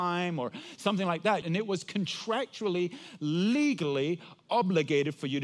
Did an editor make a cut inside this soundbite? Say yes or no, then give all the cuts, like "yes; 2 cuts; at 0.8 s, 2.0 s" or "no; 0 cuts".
yes; 1 cut; at 1.4 s